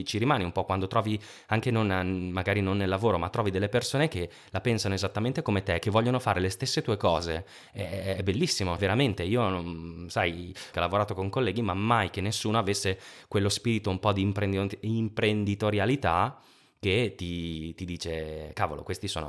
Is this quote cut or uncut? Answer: cut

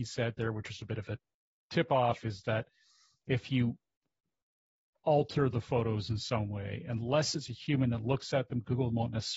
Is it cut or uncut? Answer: uncut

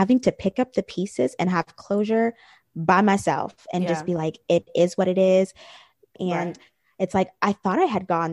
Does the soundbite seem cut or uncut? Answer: cut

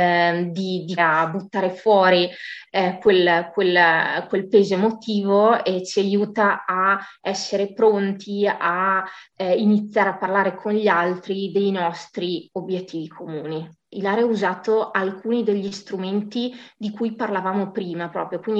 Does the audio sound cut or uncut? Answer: cut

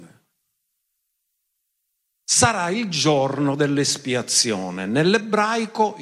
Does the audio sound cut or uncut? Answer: uncut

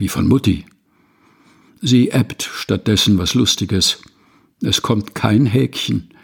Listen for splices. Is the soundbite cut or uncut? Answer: uncut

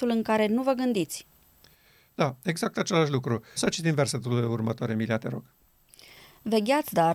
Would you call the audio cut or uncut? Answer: cut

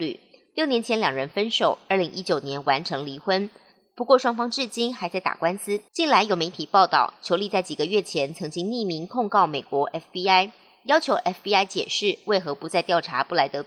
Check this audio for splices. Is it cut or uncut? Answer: cut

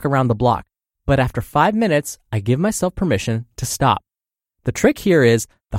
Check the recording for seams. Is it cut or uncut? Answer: uncut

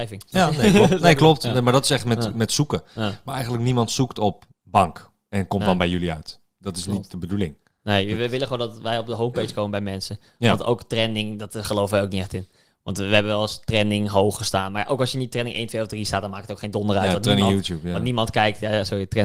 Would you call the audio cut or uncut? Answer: uncut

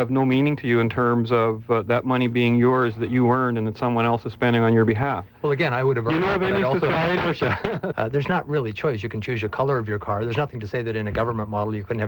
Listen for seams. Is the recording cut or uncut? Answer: cut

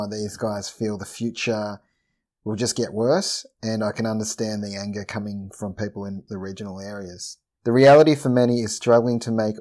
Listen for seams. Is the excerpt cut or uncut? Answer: cut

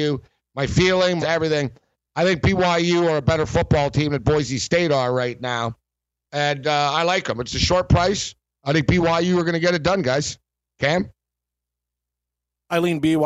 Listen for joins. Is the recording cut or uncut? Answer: cut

